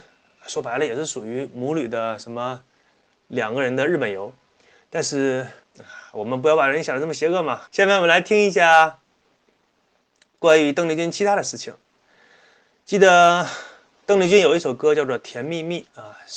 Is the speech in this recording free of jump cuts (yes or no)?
no